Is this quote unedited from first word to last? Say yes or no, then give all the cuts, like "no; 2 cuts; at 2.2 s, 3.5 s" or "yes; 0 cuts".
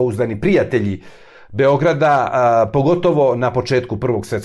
yes; 0 cuts